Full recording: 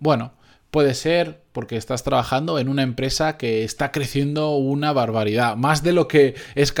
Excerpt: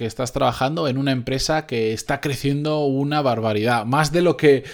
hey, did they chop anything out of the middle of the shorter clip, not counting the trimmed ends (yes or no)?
no